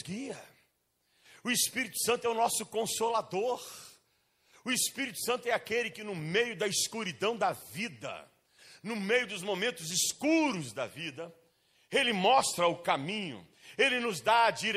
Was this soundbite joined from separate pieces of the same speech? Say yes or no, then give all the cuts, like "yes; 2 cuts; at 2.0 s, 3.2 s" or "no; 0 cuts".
no; 0 cuts